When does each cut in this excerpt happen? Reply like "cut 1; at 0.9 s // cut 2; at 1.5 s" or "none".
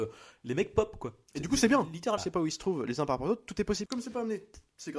cut 1; at 2.2 s // cut 2; at 3.9 s